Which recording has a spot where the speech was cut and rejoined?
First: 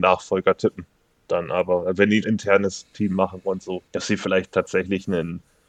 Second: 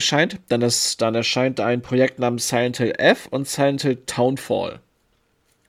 first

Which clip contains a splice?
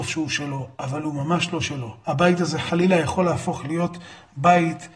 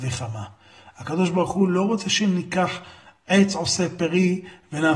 first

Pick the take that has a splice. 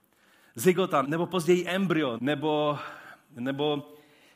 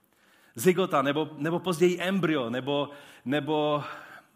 first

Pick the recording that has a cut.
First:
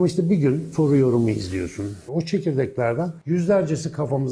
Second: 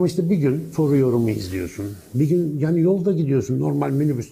first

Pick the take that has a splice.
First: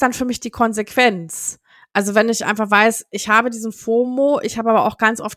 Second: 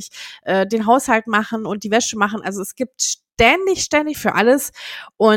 second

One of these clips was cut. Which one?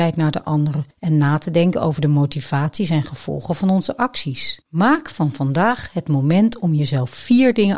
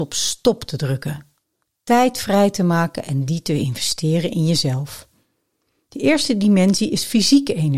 first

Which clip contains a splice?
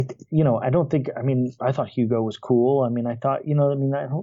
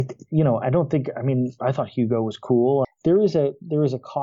second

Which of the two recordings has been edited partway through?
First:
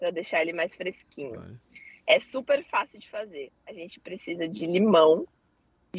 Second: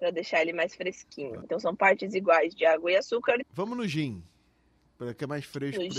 second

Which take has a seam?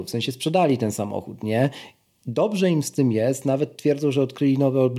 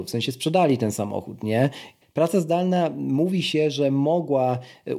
second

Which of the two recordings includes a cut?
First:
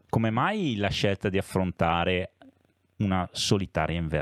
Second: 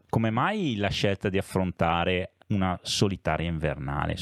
second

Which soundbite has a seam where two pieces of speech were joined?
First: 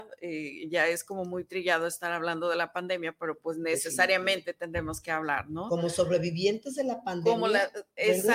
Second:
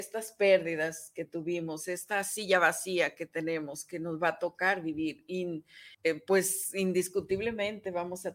second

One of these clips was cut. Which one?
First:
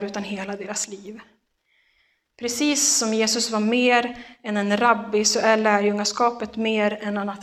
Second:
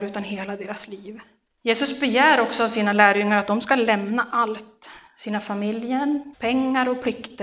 second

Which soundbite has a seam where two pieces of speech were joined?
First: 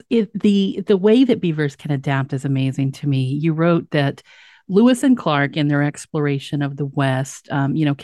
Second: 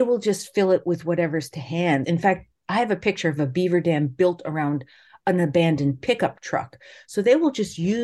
second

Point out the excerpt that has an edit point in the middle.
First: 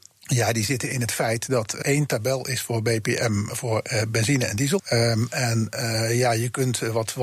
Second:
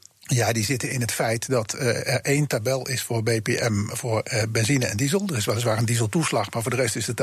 first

